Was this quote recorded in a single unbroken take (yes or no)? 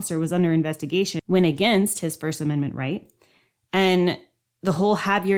no